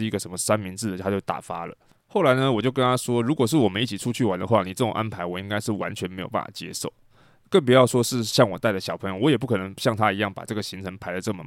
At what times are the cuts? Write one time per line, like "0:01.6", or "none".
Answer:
none